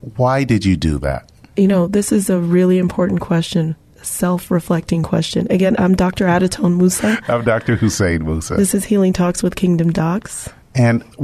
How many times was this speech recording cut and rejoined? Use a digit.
0